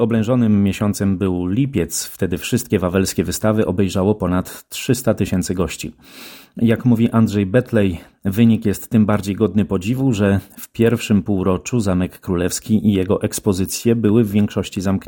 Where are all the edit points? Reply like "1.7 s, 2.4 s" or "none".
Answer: 8.1 s